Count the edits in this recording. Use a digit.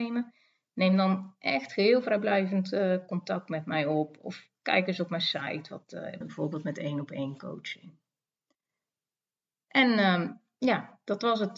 1